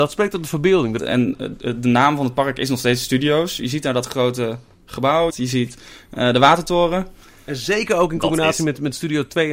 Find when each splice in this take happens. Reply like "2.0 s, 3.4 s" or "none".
1.0 s, 5.3 s